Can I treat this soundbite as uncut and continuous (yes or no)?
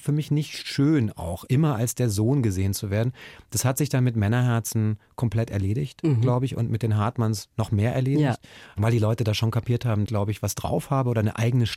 no